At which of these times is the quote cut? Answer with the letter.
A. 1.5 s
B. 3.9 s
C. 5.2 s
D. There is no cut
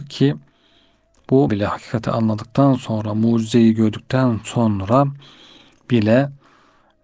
A